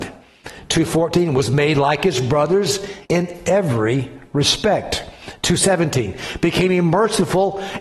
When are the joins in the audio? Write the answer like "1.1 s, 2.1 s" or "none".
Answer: 3.0 s